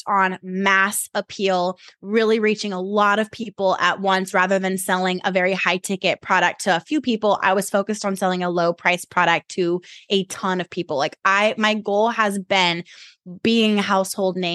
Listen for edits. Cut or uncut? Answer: uncut